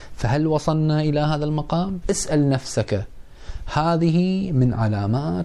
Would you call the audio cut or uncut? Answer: cut